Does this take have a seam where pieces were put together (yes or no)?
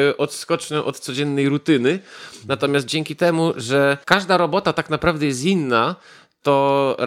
yes